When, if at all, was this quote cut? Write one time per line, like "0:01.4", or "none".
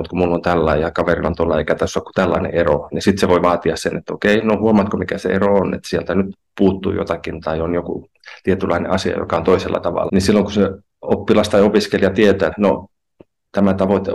0:10.1
0:12.5